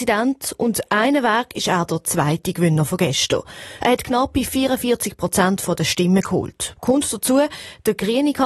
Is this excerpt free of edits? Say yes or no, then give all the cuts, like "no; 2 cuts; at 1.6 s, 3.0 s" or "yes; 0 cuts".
no; 1 cut; at 3.8 s